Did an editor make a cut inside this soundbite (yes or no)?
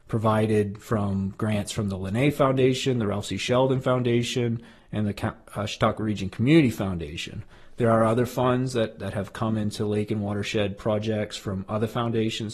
no